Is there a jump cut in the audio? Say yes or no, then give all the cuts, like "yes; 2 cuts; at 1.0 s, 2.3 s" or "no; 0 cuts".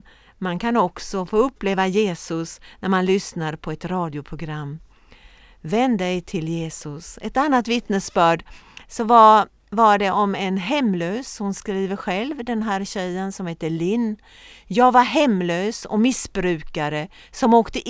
no; 0 cuts